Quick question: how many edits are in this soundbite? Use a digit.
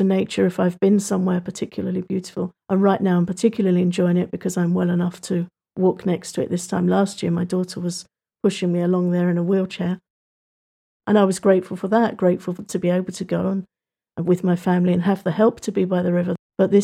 1